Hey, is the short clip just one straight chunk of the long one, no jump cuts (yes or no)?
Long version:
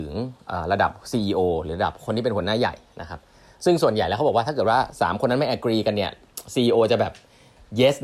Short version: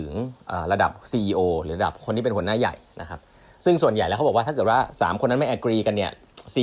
yes